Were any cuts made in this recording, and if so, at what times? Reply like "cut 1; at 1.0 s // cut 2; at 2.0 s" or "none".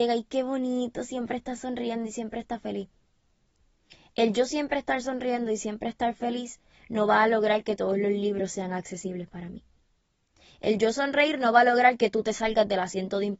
none